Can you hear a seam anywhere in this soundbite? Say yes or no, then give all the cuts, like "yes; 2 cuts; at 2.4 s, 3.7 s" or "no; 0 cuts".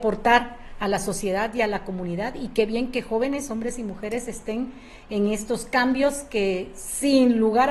no; 0 cuts